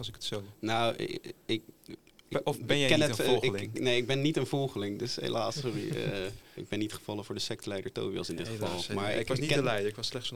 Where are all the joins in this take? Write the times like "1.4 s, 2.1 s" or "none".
6.6 s